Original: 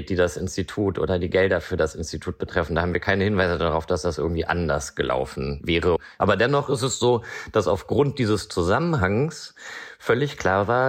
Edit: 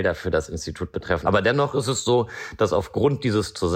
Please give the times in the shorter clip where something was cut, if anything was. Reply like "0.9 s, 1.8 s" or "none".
1.2 s